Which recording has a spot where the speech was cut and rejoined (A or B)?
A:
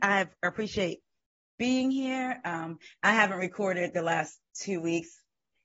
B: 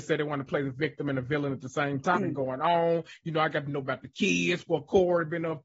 B